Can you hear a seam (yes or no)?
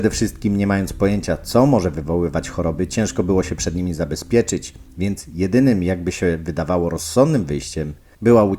no